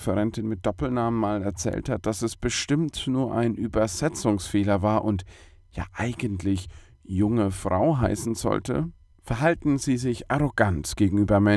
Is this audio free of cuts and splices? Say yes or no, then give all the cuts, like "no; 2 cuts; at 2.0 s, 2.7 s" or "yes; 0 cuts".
no; 1 cut; at 9.1 s